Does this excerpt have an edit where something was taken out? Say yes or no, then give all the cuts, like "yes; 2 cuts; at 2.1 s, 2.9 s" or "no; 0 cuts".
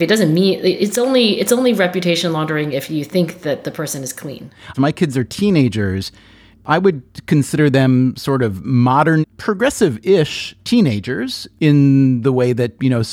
yes; 2 cuts; at 4.7 s, 9.2 s